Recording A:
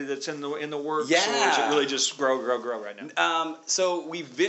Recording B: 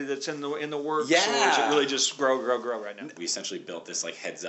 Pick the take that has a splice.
B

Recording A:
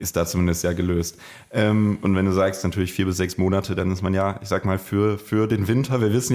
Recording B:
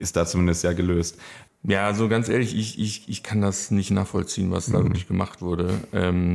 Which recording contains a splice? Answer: B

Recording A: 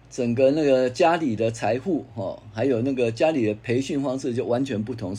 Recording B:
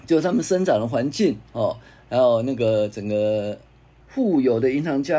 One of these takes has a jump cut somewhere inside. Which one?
B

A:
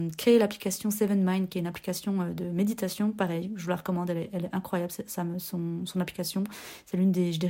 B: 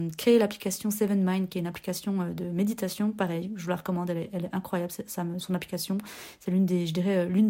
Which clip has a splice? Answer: B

